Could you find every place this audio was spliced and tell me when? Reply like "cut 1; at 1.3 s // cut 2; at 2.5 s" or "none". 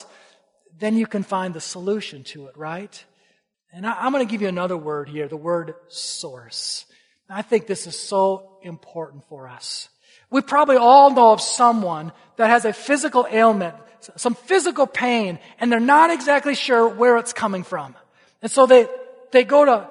cut 1; at 3.5 s